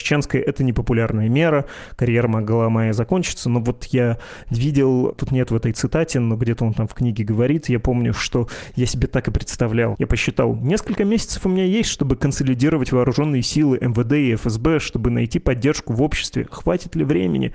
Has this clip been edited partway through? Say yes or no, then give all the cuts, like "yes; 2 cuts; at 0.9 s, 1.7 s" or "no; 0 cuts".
yes; 1 cut; at 9.9 s